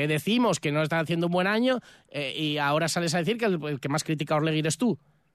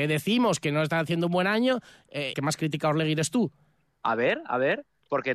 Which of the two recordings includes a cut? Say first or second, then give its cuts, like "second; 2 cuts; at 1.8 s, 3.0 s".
second; 2 cuts; at 2.3 s, 3.9 s